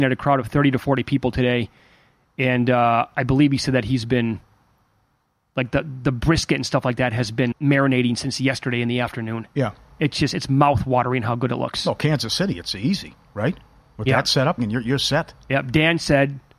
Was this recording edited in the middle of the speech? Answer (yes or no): yes